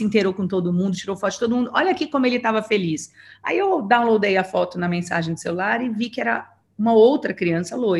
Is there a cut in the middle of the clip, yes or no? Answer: no